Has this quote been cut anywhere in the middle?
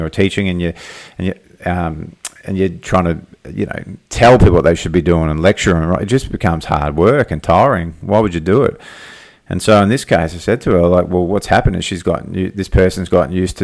no; 0 cuts

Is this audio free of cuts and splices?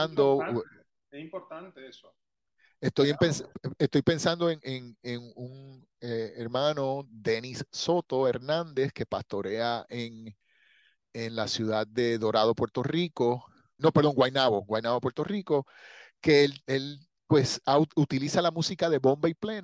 no; 1 cut; at 13.8 s

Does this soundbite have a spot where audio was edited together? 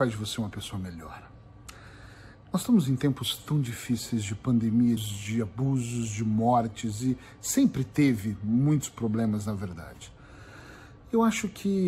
yes; 1 cut; at 5.0 s

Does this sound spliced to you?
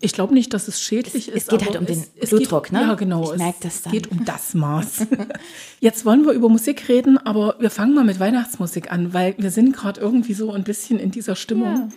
no; 0 cuts

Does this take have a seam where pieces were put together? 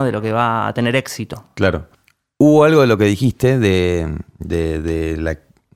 no; 0 cuts

